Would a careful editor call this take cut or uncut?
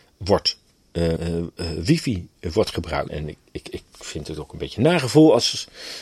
cut